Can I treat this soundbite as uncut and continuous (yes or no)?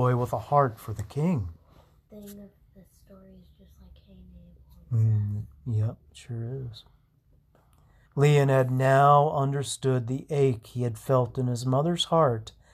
no